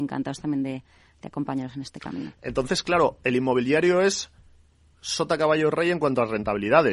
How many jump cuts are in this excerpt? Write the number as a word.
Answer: one